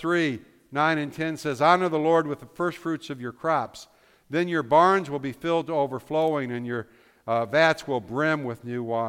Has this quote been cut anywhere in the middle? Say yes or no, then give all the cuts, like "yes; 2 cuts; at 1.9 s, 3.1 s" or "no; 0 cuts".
no; 0 cuts